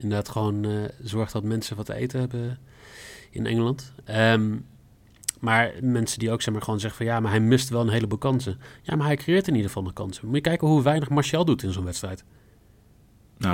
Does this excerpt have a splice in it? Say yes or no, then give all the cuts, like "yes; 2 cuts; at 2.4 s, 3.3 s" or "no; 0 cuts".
no; 0 cuts